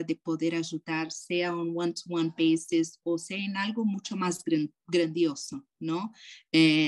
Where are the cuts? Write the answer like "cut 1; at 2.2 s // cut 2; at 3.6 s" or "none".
none